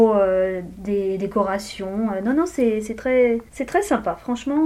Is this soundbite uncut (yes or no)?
no